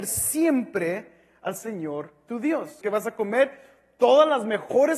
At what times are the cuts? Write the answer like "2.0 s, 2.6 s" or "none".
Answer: 2.8 s